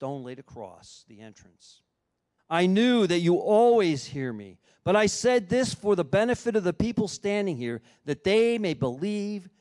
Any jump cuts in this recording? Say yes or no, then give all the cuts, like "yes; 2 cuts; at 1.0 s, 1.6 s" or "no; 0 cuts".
yes; 1 cut; at 2.4 s